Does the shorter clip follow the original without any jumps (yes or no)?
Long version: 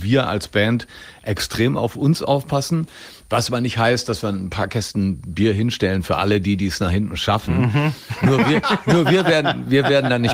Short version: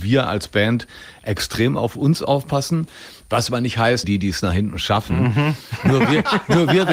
no